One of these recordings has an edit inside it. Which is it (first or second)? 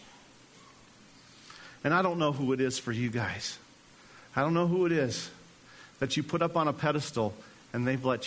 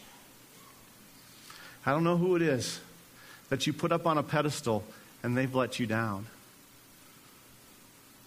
second